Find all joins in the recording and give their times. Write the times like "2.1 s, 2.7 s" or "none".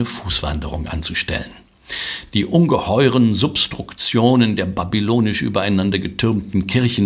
none